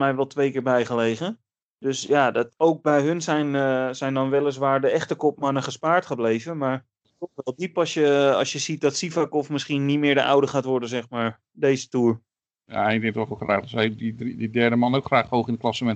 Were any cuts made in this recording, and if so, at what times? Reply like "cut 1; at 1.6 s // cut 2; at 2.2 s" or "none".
none